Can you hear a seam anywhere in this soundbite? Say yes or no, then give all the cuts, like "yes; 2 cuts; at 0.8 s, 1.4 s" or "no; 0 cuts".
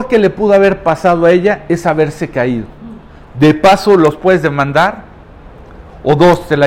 yes; 1 cut; at 3.3 s